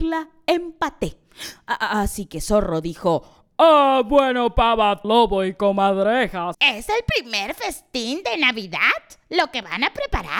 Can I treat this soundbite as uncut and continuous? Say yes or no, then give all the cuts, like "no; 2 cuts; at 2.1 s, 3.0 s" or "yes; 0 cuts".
no; 2 cuts; at 5.0 s, 6.5 s